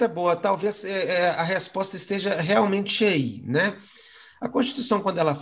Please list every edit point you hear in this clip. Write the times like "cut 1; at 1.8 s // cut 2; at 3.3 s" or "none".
none